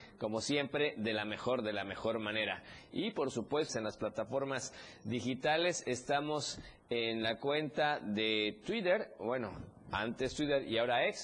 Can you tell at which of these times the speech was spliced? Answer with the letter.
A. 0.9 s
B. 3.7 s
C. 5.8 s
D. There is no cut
B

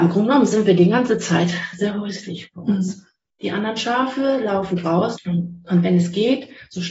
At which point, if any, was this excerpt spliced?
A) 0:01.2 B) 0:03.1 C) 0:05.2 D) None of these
C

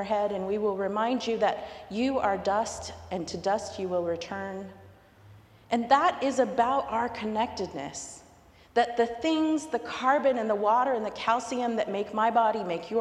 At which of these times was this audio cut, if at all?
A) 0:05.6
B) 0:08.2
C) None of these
C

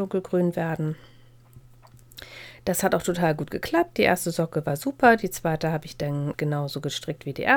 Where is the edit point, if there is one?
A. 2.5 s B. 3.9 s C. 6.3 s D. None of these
C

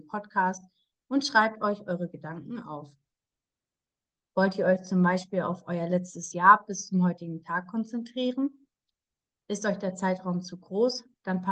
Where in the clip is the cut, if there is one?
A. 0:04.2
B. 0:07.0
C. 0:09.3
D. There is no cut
A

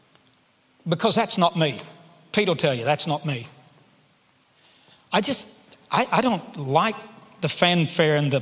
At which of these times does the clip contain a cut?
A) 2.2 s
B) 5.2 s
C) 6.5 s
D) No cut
D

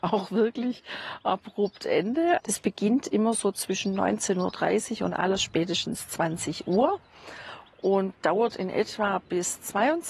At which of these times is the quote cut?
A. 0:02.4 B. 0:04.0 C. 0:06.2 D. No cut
A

